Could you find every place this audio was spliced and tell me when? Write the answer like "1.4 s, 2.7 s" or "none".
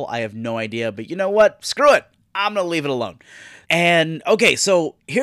3.6 s